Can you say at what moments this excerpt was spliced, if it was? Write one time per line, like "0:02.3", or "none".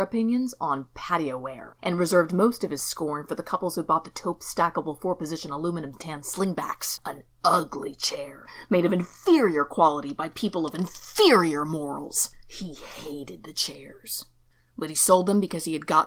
none